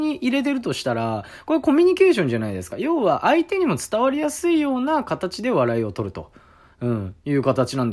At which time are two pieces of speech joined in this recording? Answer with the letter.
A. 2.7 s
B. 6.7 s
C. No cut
C